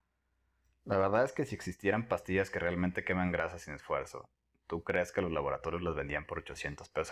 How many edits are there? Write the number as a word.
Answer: zero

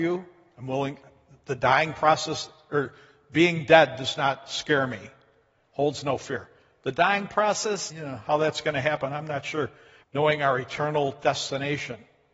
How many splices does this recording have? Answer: two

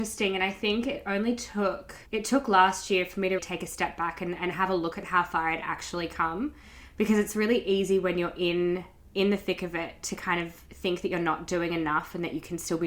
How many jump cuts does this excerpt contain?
two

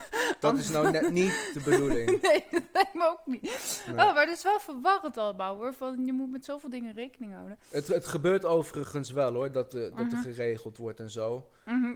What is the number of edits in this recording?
zero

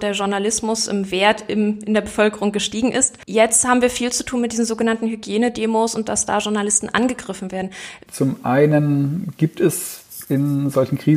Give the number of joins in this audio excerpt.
one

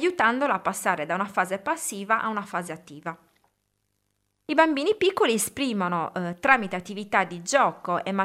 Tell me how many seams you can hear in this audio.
zero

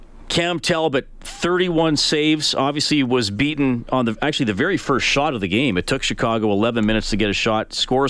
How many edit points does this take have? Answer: zero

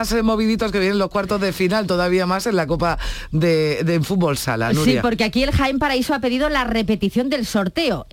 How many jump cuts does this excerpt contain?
zero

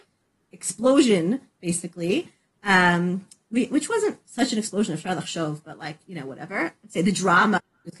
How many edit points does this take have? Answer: zero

